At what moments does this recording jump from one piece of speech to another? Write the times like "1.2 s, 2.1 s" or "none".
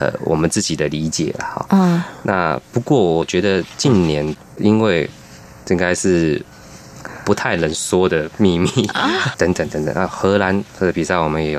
5.6 s, 9.3 s